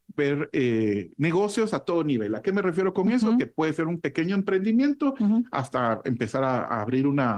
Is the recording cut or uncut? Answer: uncut